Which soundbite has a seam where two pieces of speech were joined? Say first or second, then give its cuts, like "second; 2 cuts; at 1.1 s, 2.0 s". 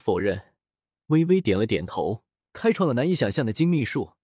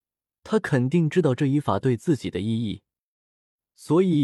first; 1 cut; at 2.4 s